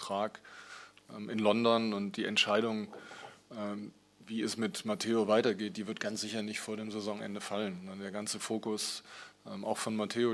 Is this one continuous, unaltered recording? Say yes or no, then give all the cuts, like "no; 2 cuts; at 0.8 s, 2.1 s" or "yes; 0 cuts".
yes; 0 cuts